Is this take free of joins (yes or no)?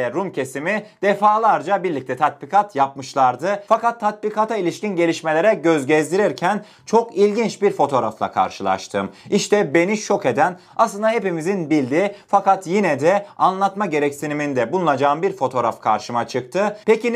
yes